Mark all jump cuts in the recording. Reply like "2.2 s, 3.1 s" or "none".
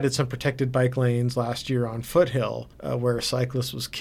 2.7 s